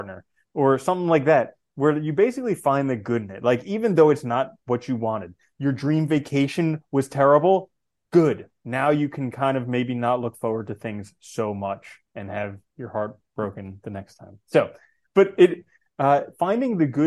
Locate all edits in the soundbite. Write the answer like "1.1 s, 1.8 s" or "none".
none